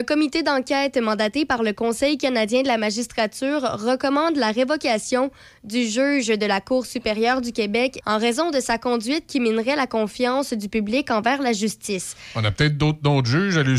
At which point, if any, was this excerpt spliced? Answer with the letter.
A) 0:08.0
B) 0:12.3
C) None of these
A